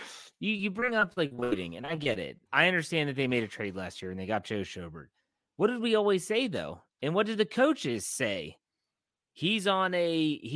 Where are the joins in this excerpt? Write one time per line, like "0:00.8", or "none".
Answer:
0:02.5